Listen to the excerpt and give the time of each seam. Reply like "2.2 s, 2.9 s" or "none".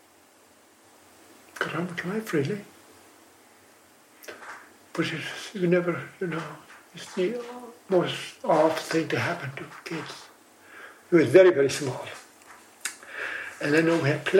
11.1 s